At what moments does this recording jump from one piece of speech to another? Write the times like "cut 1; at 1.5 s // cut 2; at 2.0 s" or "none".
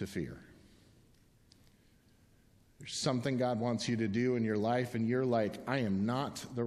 none